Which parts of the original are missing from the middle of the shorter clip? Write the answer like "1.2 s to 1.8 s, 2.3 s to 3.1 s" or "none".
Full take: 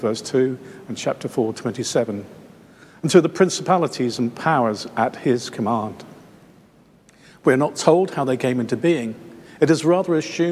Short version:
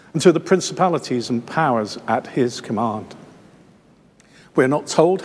none